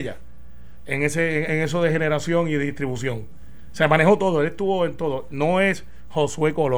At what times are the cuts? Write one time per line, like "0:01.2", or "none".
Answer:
none